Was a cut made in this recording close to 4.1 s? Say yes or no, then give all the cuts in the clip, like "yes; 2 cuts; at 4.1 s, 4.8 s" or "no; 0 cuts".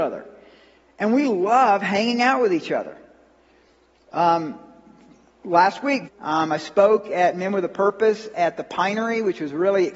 no; 1 cut; at 6.1 s